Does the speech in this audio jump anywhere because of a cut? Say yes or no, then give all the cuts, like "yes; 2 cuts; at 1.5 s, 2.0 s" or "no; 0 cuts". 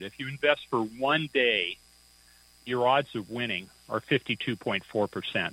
no; 0 cuts